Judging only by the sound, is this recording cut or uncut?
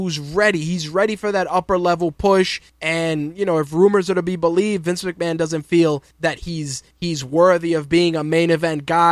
uncut